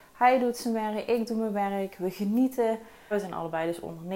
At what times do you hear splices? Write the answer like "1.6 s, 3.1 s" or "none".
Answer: 3.1 s

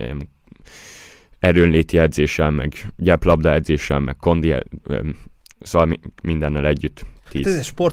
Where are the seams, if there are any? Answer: 4.8 s

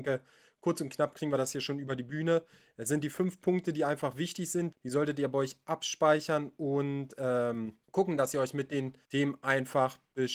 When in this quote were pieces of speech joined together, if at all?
4.7 s, 7.8 s, 9.0 s

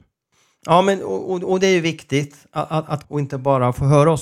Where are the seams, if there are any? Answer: 3.0 s

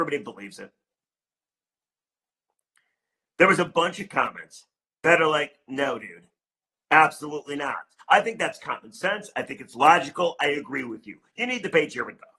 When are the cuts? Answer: 8.0 s

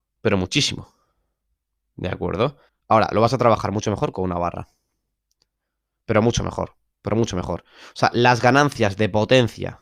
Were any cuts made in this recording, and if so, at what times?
2.7 s

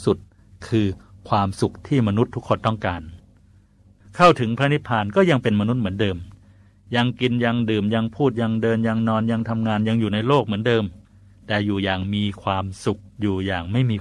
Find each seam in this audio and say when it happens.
13.1 s

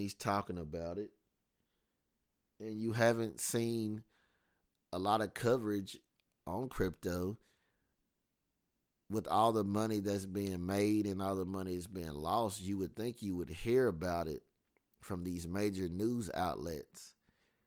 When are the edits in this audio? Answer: none

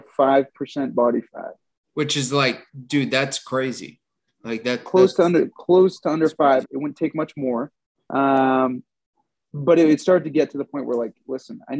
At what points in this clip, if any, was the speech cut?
6.6 s

